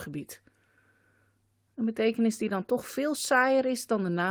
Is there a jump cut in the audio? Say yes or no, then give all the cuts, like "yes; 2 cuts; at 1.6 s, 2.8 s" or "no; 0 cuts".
no; 0 cuts